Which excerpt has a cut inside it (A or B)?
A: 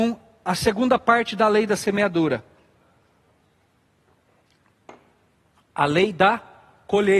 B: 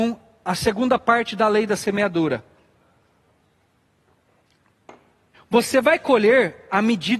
B